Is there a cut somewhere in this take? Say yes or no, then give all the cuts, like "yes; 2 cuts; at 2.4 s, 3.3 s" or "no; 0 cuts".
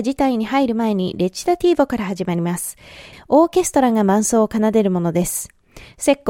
yes; 1 cut; at 3.1 s